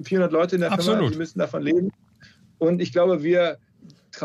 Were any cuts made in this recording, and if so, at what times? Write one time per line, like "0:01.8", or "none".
none